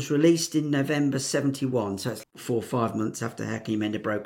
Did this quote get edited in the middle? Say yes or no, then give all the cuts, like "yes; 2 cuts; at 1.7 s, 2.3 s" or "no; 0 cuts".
yes; 1 cut; at 2.2 s